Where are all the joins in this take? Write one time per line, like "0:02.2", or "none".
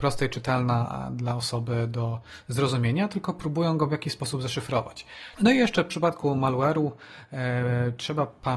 0:05.4